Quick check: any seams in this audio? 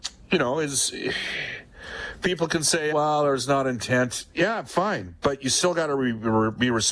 yes; 1 cut; at 2.9 s

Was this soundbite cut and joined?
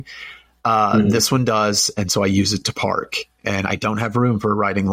no; 0 cuts

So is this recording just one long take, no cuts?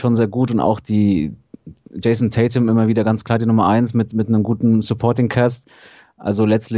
yes; 0 cuts

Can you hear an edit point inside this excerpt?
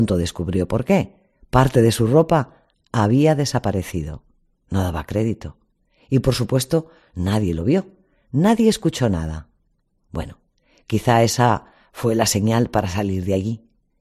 no; 0 cuts

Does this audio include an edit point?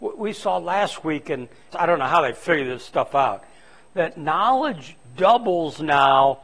yes; 1 cut; at 1.7 s

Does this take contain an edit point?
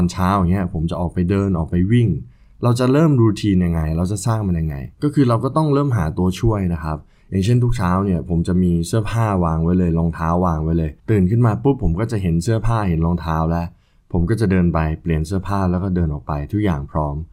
yes; 2 cuts; at 4.9 s, 11.0 s

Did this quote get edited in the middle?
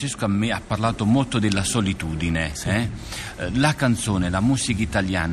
no; 0 cuts

